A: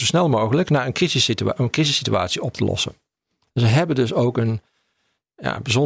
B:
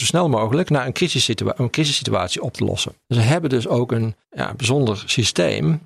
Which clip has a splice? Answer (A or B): B